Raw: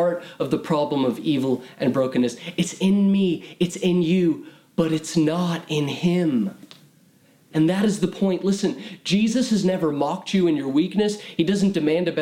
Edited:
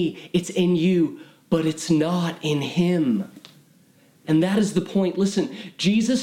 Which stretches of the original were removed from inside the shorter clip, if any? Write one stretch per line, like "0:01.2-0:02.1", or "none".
none